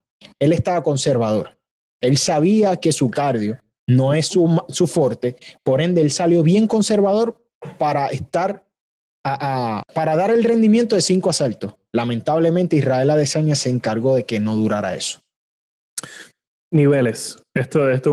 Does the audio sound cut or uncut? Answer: cut